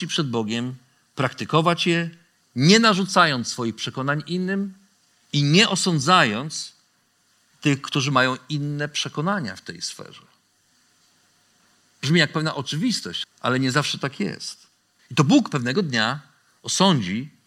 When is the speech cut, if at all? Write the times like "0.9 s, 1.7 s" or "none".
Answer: 13.2 s, 15.0 s